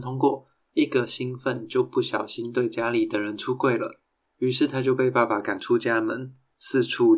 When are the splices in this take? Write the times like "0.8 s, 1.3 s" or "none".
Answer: none

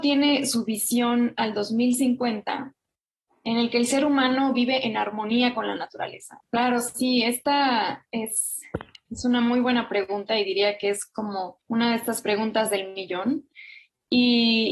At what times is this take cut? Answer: 6.4 s, 11.6 s

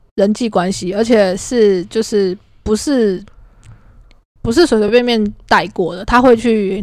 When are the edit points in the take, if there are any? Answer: none

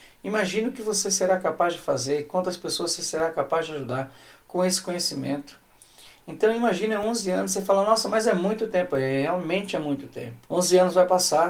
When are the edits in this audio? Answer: 10.5 s

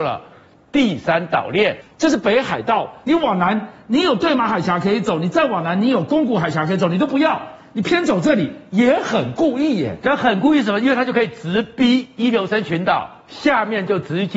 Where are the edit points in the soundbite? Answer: 3.0 s

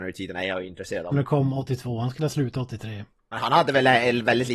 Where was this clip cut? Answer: 1.1 s, 3.1 s

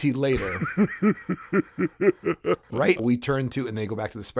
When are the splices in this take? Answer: 3.0 s

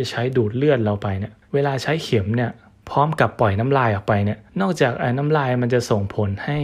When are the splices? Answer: 1.4 s, 4.5 s

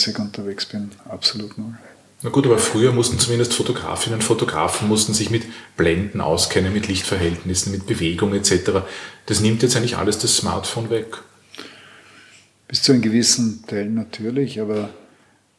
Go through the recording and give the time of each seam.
1.0 s

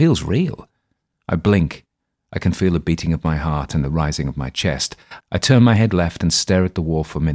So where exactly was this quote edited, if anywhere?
1.1 s, 5.2 s

